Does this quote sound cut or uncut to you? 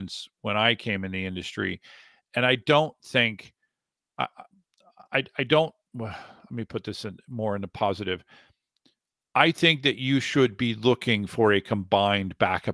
uncut